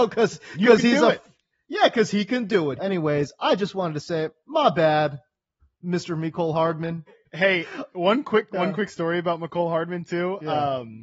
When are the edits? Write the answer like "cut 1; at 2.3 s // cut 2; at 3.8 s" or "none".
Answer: cut 1; at 2.8 s // cut 2; at 7.1 s